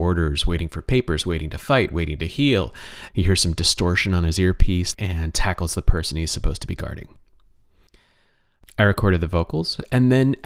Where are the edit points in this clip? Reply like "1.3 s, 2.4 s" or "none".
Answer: 3.1 s, 4.9 s

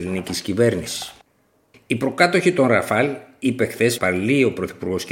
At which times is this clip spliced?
1.7 s, 4.0 s

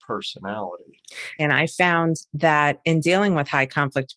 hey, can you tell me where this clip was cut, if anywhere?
1.4 s

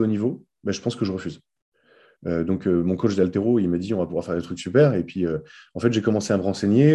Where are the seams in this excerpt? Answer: 2.2 s

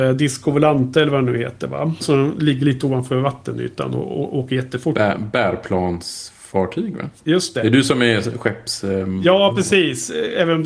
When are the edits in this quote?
2.0 s

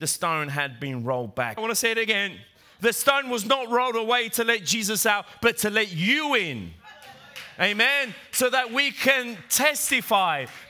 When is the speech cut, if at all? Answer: 1.6 s

